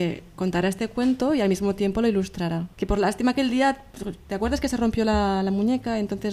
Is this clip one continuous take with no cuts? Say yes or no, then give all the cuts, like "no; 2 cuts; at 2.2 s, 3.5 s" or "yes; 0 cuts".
no; 1 cut; at 2.7 s